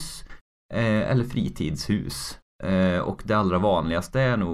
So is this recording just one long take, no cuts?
yes; 0 cuts

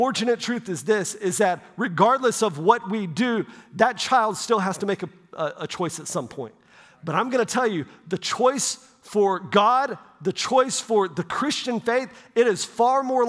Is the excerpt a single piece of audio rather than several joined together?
yes; 0 cuts

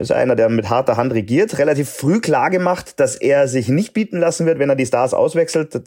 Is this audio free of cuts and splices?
yes; 0 cuts

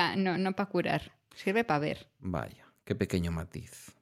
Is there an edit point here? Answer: no; 0 cuts

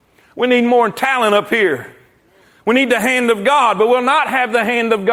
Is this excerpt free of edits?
yes; 0 cuts

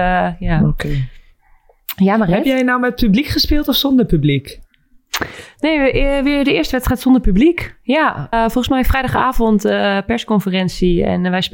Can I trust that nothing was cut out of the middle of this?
no; 1 cut; at 8.3 s

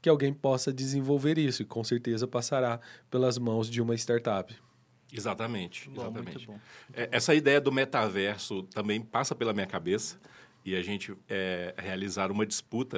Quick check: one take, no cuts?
yes; 0 cuts

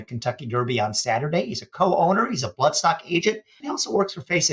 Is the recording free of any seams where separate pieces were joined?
no; 1 cut; at 3.6 s

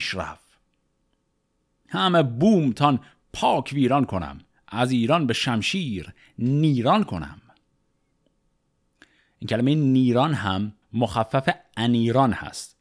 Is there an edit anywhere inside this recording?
yes; 1 cut; at 10.8 s

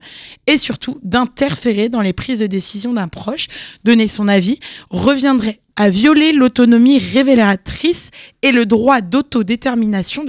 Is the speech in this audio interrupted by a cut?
yes; 1 cut; at 5.7 s

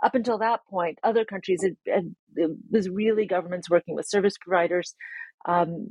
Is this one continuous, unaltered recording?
yes; 0 cuts

